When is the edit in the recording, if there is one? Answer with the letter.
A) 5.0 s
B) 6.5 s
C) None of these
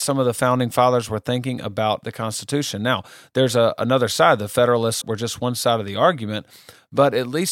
A